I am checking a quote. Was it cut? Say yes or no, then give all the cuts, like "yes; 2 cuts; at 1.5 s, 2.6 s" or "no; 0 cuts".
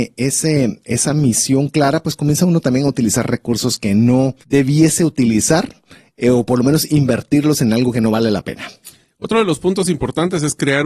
yes; 1 cut; at 4.4 s